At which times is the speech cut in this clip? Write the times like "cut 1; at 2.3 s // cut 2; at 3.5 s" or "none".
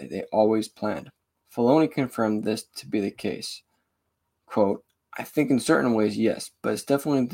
none